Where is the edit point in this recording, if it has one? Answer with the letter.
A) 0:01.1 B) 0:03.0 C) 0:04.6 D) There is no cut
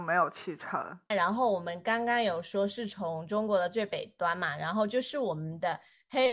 A